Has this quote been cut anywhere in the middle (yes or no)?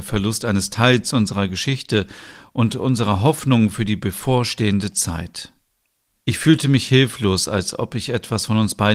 yes